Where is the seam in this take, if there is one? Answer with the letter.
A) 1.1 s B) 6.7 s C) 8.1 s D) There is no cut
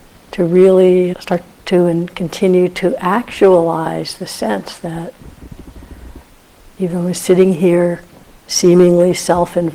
A